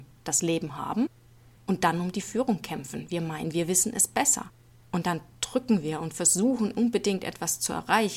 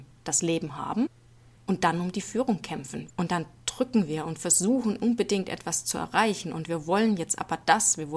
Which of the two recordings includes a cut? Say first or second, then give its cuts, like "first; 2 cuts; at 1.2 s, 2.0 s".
second; 1 cut; at 3.1 s